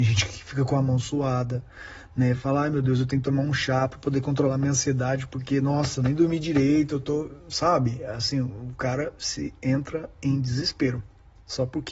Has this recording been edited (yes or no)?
no